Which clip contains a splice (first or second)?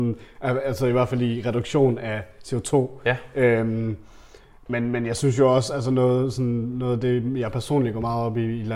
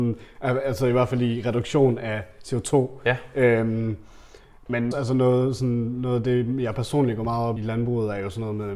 second